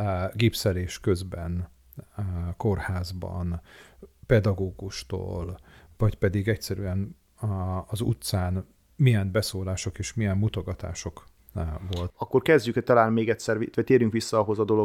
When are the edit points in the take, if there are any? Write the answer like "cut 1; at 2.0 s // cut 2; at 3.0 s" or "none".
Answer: cut 1; at 12.1 s